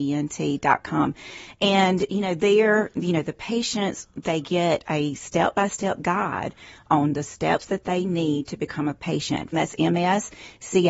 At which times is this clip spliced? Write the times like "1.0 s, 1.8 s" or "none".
9.5 s

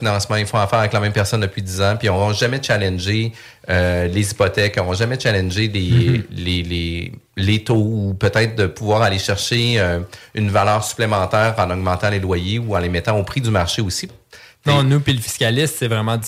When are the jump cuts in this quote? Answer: 14.1 s

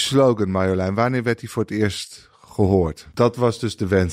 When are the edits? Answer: 3.1 s

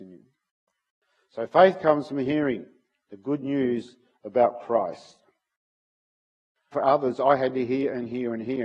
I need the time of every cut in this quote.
6.7 s

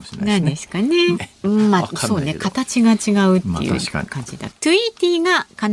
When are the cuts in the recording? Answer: 1.2 s, 4.5 s

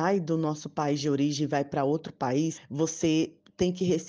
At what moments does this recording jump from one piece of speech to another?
2.5 s

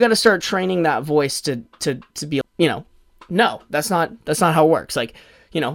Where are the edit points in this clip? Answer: 2.4 s

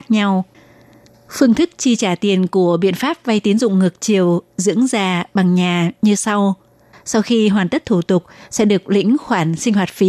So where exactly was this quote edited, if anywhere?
none

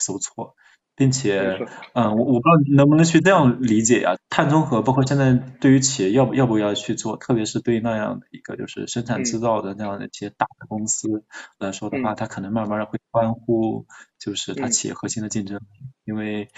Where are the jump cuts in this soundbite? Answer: 4.2 s, 6.3 s

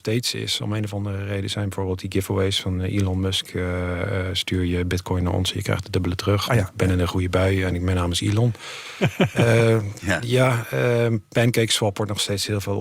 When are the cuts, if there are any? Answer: none

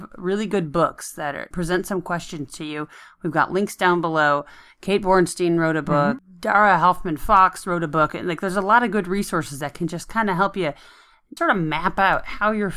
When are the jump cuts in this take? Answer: 1.5 s, 11.4 s

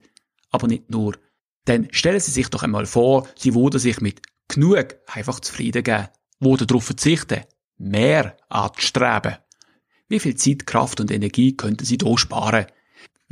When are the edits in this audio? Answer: none

